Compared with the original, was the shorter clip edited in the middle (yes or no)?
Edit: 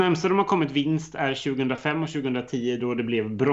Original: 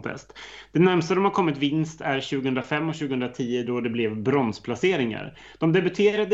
no